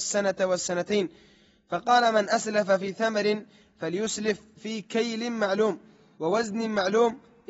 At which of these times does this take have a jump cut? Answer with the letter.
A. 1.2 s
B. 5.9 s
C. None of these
C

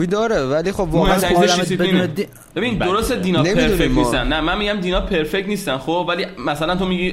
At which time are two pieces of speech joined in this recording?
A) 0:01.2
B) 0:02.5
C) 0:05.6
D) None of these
B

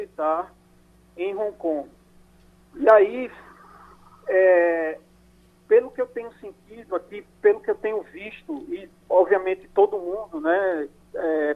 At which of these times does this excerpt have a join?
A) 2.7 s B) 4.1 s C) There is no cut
C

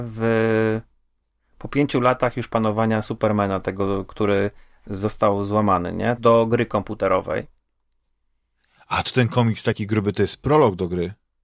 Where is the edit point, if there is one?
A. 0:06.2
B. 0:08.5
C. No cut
A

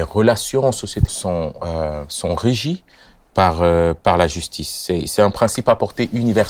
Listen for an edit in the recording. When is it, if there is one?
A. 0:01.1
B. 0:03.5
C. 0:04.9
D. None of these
A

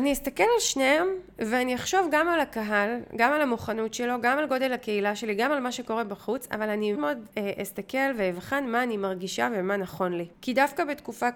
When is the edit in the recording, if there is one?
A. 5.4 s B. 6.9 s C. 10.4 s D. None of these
B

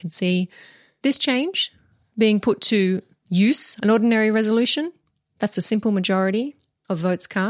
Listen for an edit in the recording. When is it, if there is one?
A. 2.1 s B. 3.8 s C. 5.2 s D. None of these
B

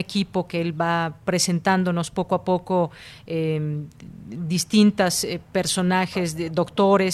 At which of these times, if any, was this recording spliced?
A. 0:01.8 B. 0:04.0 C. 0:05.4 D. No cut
D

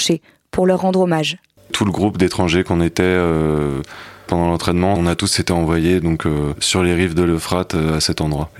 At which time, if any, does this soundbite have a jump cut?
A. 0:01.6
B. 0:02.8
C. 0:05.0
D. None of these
A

